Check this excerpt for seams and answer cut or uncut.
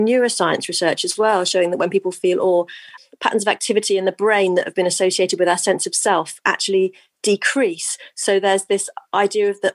uncut